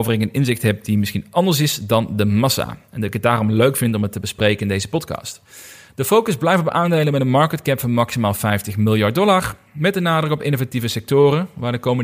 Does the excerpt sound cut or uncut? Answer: uncut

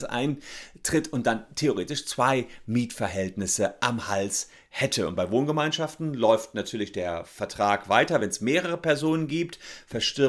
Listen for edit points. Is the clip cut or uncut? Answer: uncut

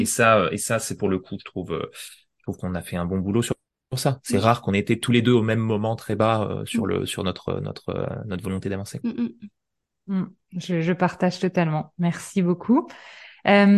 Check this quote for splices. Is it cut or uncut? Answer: uncut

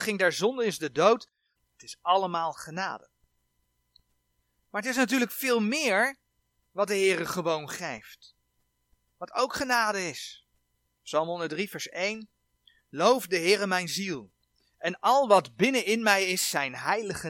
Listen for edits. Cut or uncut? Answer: cut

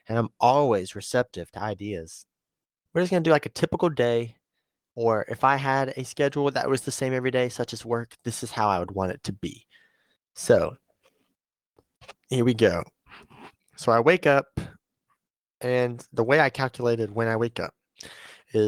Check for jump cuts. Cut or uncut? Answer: cut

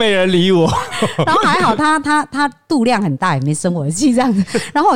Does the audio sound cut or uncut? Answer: uncut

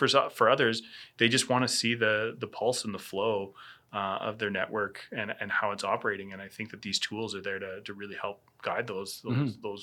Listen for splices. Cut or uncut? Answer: uncut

